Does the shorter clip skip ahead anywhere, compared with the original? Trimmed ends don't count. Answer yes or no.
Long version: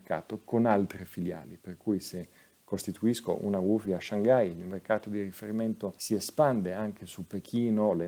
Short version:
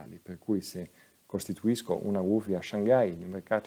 no